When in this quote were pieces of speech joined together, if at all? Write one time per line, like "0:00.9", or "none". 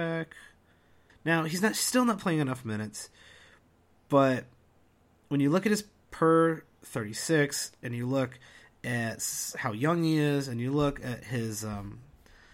0:01.1